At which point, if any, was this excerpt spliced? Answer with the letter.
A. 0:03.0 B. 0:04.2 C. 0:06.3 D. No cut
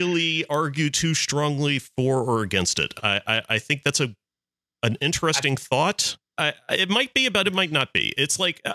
C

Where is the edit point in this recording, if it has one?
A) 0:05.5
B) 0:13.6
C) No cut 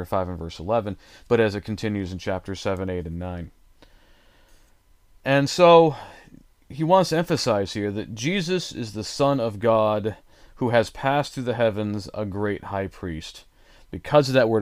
C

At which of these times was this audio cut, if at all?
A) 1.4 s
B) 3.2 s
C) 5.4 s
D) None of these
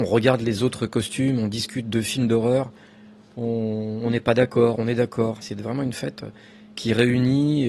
C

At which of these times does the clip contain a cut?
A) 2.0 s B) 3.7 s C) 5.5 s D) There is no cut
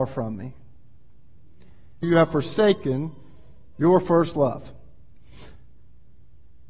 A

